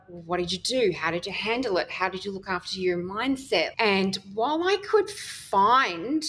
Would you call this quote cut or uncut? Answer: cut